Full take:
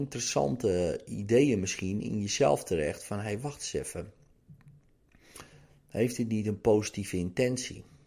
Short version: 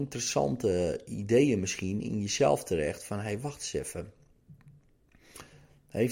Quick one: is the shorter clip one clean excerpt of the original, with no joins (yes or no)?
yes